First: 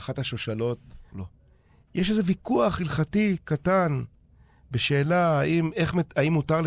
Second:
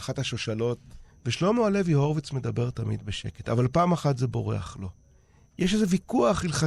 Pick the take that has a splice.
first; 1 cut; at 1.1 s

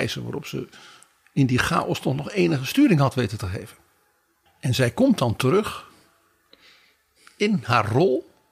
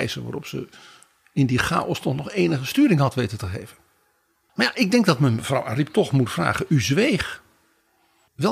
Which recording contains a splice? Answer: first; 1 cut; at 4.5 s

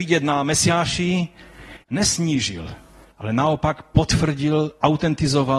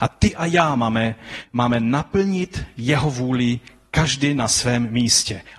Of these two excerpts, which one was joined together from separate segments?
first; 1 cut; at 1.8 s

